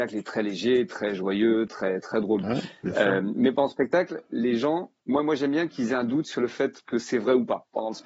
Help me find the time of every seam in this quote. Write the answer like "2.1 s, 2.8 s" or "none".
2.4 s, 5.0 s